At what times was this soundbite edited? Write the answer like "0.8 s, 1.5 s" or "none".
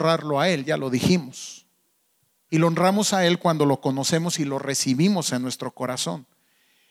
2.5 s